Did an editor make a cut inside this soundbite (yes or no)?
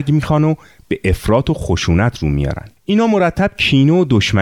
yes